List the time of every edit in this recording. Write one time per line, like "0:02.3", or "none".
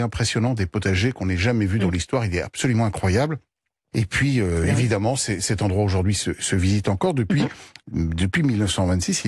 0:03.9
0:07.8